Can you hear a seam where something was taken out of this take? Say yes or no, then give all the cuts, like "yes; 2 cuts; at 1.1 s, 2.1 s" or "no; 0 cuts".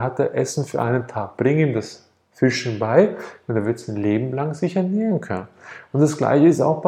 no; 0 cuts